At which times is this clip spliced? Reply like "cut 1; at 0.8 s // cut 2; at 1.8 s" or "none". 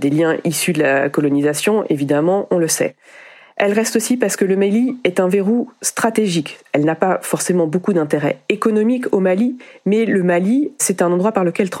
none